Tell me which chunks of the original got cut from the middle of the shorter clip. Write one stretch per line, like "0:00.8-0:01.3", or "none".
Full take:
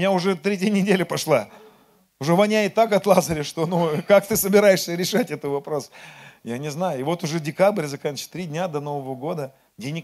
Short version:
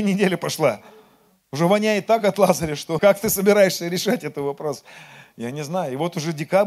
0:03.7-0:04.1